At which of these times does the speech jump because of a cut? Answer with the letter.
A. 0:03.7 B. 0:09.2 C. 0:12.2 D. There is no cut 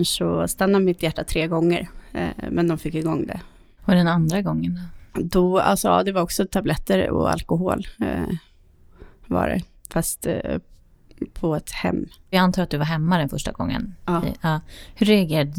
D